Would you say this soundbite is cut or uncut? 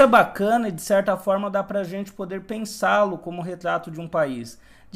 uncut